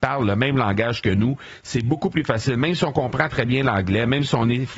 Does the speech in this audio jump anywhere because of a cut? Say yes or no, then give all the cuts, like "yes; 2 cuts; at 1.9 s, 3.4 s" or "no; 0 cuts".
yes; 1 cut; at 3.3 s